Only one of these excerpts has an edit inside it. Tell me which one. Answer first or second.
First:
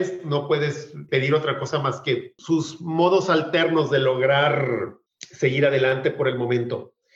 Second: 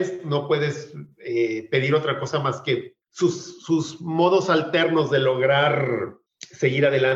first